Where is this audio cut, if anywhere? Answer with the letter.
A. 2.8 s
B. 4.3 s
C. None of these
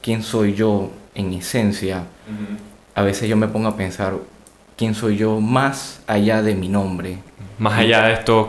C